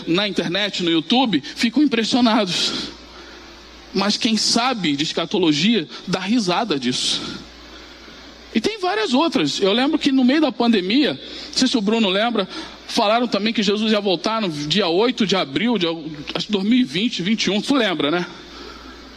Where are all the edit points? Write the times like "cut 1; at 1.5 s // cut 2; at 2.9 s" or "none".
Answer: none